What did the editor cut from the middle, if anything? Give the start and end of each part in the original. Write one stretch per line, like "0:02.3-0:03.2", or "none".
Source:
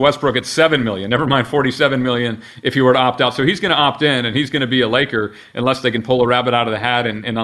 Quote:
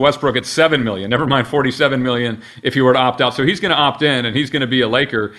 none